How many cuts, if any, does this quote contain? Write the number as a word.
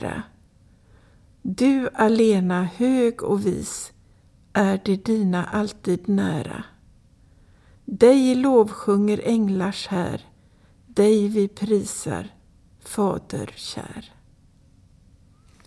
zero